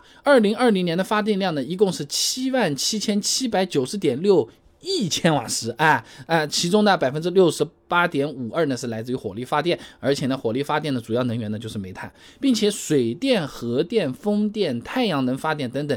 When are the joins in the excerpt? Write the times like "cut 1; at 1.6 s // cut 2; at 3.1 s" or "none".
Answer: none